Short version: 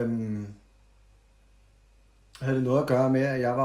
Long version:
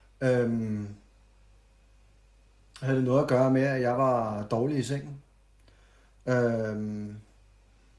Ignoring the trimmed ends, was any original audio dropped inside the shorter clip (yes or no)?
no